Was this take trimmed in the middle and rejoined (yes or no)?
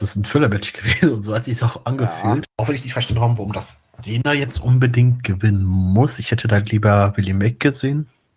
yes